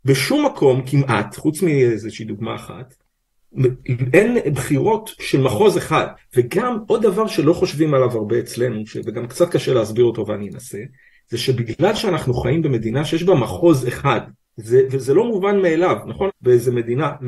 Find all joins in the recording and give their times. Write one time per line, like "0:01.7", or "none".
0:06.2
0:16.3